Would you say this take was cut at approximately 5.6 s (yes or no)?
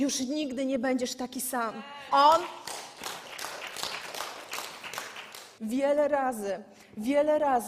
yes